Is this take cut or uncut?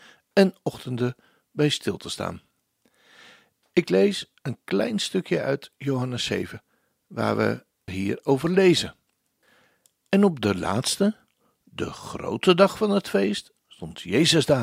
cut